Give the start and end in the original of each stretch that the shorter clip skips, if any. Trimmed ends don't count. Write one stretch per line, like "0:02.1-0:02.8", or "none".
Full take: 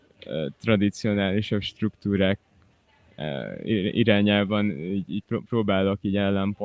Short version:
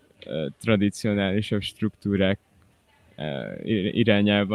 none